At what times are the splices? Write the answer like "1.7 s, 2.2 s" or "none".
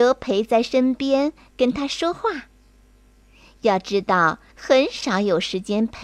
4.5 s